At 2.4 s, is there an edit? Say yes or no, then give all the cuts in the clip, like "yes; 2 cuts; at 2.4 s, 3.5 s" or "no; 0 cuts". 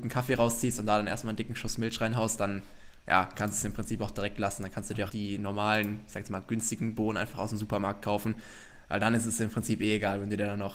no; 1 cut; at 5.1 s